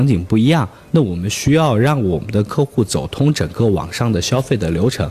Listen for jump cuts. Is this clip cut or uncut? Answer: uncut